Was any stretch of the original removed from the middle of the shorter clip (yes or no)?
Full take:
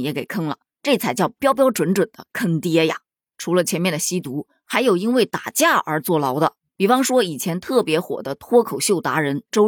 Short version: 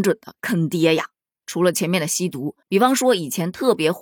yes